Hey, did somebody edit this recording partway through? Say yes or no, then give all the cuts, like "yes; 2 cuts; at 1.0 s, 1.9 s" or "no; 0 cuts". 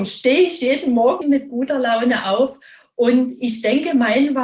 yes; 1 cut; at 1.2 s